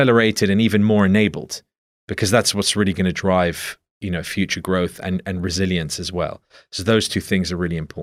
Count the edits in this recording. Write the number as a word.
zero